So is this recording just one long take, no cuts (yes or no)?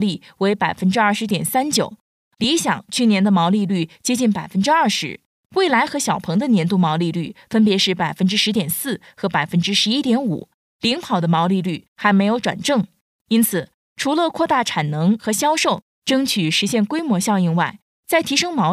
yes